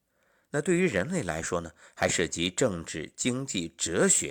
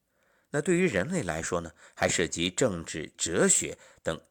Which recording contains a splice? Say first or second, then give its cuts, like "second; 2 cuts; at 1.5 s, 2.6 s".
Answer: second; 1 cut; at 3.2 s